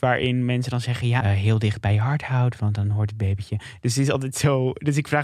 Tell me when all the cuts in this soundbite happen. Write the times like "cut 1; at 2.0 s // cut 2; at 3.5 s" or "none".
cut 1; at 1.2 s